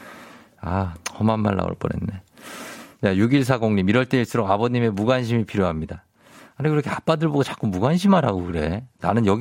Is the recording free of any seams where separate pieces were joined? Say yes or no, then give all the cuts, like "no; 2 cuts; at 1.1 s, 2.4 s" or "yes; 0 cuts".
yes; 0 cuts